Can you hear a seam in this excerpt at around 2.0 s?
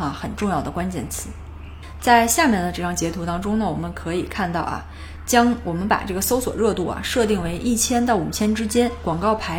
yes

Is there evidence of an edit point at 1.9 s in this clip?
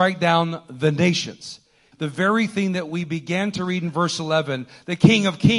yes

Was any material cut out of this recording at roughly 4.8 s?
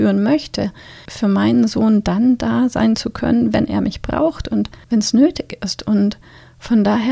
yes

